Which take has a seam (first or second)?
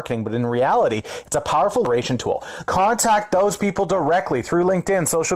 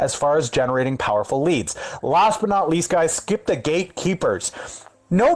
first